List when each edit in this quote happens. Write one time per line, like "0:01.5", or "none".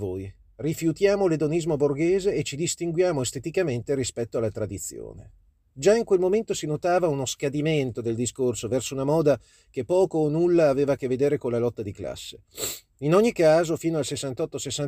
none